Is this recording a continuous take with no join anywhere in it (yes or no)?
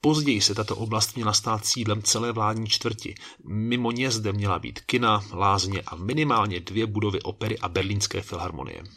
yes